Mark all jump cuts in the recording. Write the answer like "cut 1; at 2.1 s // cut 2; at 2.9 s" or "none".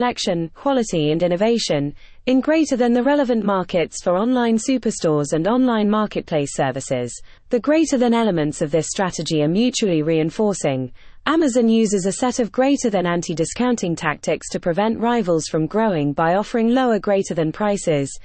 cut 1; at 7.4 s